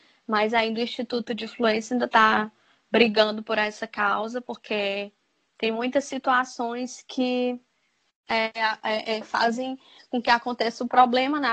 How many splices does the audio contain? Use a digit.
0